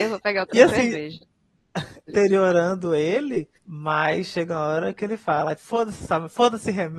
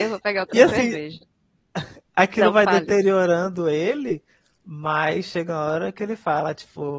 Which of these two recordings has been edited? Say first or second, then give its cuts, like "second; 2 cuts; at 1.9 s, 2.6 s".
first; 3 cuts; at 2.1 s, 3.6 s, 5.6 s